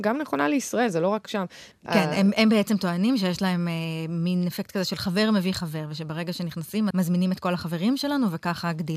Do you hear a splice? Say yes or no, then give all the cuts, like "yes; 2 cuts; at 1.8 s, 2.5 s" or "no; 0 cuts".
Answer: yes; 2 cuts; at 1.7 s, 6.9 s